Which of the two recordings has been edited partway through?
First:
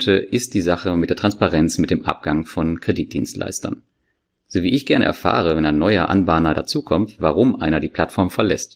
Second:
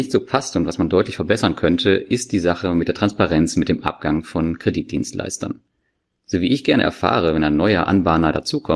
first; 1 cut; at 7.2 s

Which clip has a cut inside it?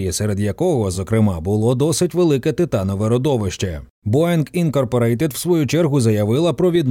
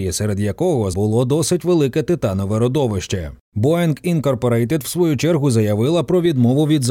second; 1 cut; at 0.9 s

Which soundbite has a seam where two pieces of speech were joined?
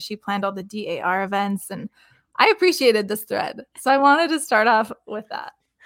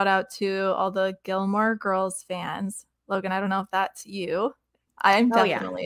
second; 1 cut; at 4.9 s

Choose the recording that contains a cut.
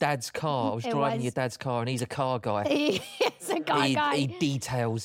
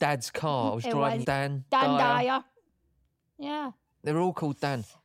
second; 1 cut; at 1.2 s

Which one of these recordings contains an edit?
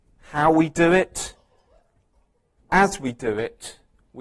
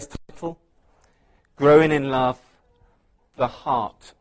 first; 1 cut; at 2.7 s

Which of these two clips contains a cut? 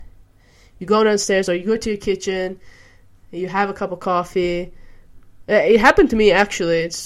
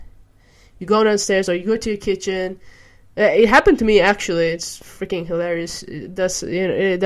second; 1 cut; at 3.1 s

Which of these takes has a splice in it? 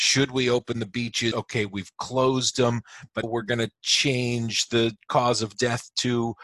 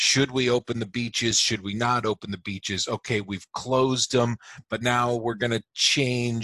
first; 2 cuts; at 1.3 s, 3.2 s

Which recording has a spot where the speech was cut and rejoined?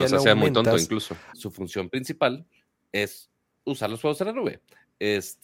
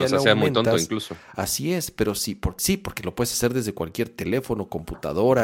first; 1 cut; at 1.3 s

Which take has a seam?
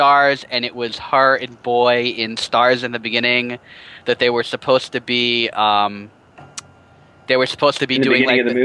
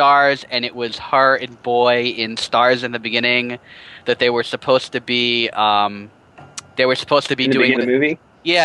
second; 2 cuts; at 6.7 s, 7.8 s

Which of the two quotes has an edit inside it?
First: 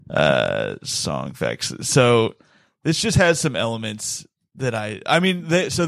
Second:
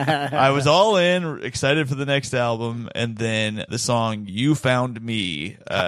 second; 1 cut; at 3.7 s

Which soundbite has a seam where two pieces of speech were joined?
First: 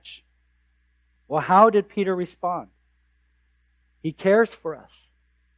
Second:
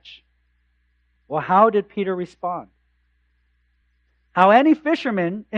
first; 1 cut; at 3.8 s

